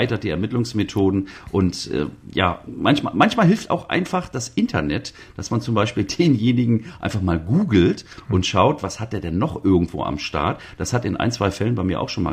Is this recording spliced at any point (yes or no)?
no